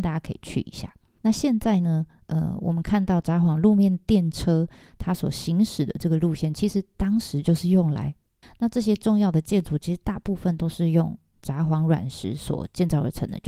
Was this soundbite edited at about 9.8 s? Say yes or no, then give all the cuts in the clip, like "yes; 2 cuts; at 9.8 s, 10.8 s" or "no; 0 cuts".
no; 2 cuts; at 1.2 s, 8.4 s